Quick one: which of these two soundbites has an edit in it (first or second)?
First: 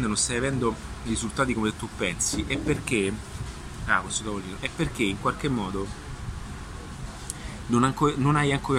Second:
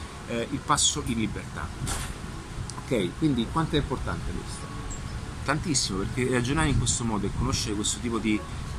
second